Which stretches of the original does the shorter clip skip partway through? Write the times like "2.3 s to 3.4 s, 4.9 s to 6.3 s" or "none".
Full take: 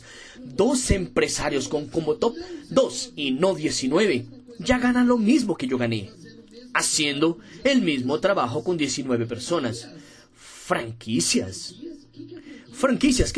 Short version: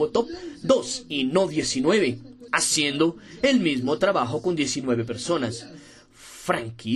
4.6 s to 6.7 s